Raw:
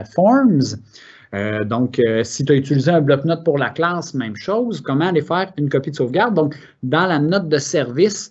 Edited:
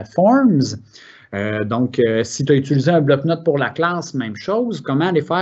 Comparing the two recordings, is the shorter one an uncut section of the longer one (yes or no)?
yes